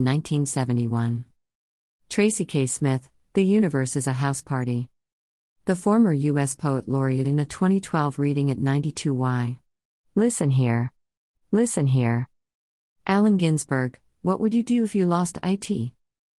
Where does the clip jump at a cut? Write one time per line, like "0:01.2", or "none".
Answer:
0:11.4